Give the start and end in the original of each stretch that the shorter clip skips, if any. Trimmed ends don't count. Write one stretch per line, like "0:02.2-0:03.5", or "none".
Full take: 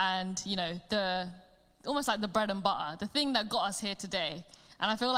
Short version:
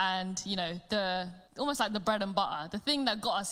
0:01.5-0:01.8